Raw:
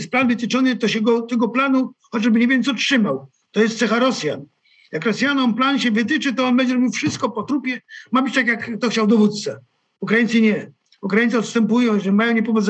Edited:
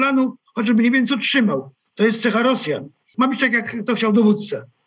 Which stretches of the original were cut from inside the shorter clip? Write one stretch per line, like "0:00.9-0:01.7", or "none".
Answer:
0:04.7-0:08.1

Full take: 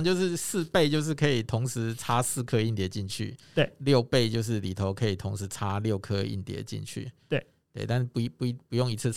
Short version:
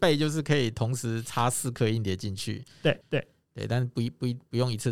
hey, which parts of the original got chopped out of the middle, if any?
0:03.7-0:07.2

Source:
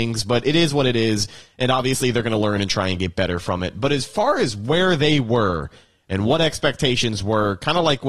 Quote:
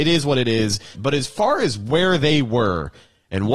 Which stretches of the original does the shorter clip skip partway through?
0:01.4-0:03.7

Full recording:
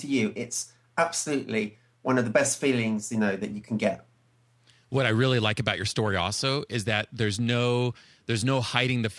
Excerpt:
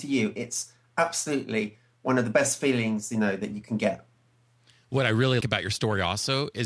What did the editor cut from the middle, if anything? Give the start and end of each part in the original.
0:05.4-0:05.6

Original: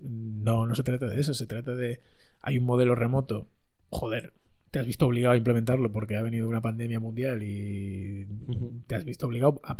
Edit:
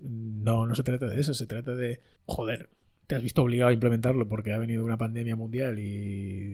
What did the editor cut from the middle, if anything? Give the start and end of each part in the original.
0:02.2-0:03.8

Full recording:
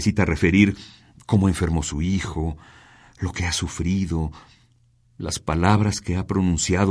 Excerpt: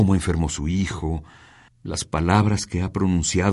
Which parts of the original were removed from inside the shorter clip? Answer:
0:03.0-0:05.0

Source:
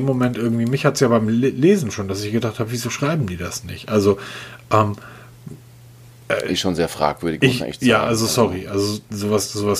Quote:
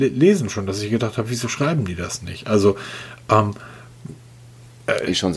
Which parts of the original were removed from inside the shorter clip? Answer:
none

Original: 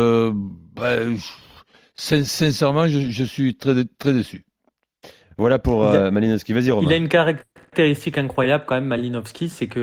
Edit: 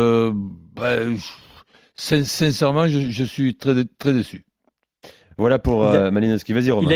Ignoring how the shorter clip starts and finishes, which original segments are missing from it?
none

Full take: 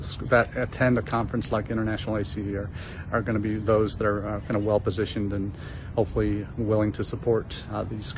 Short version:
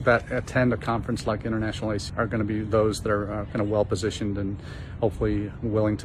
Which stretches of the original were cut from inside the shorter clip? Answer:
0:02.3-0:03.0

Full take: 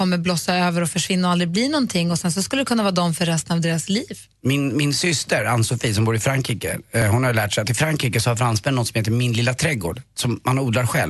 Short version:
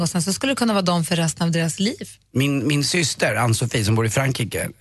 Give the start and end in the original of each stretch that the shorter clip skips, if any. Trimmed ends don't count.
none

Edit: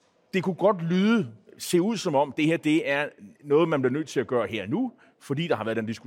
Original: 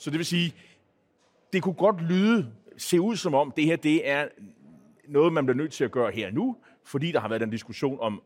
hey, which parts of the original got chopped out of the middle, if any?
0:04.5-0:05.0

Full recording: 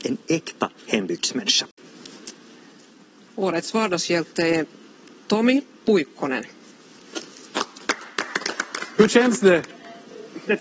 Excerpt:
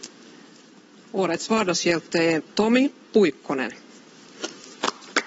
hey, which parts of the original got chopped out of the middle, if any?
0:04.7-0:05.2

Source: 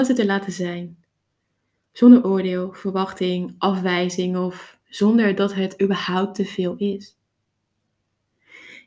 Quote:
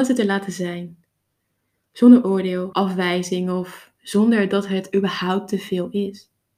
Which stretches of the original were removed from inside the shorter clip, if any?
0:02.7-0:03.6

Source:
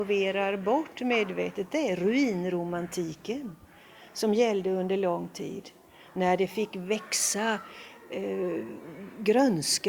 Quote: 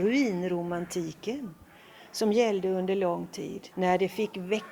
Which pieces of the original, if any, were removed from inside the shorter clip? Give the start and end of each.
0:05.7-0:06.1

